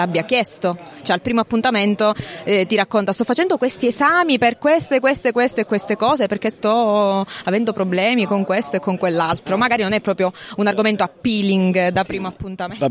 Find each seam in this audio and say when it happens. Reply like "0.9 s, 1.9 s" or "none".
none